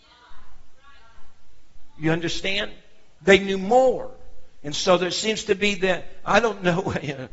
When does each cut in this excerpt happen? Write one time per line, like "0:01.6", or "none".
0:03.2